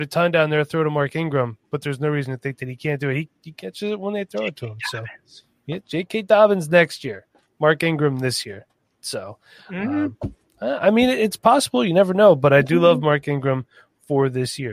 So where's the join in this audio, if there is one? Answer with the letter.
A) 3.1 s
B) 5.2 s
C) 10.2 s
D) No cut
D